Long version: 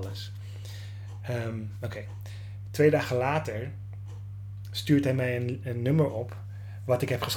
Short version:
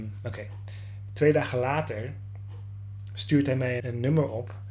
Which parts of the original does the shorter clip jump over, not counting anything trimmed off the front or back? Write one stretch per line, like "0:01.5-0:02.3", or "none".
0:05.4-0:05.6